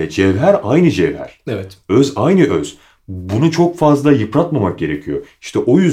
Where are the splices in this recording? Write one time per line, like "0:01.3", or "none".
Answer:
none